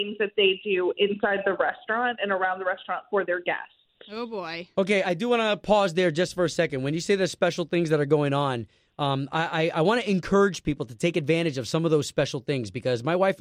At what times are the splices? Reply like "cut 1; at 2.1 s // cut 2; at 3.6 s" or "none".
cut 1; at 5.0 s